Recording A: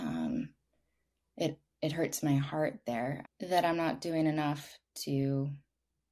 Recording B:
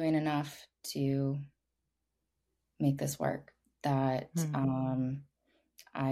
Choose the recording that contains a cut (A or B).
A